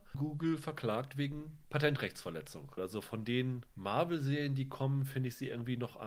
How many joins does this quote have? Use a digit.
1